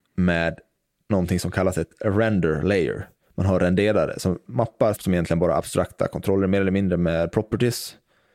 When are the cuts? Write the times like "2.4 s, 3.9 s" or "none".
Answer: 5.0 s